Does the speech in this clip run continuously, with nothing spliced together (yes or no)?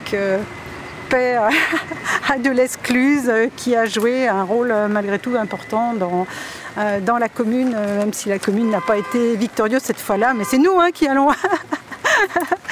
yes